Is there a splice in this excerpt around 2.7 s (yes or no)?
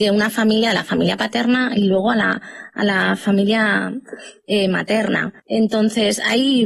no